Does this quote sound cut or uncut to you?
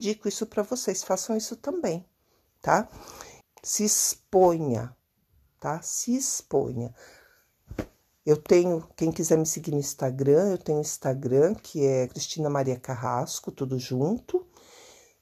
cut